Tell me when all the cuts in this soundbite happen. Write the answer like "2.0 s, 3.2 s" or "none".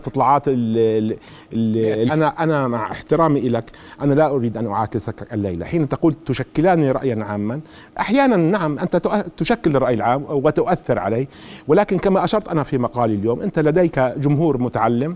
2.1 s